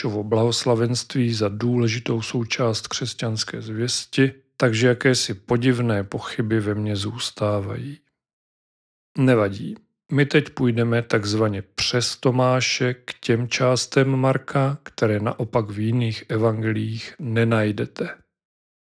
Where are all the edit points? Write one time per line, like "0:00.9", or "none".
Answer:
none